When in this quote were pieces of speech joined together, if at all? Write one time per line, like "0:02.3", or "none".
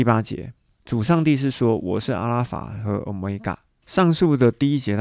0:03.8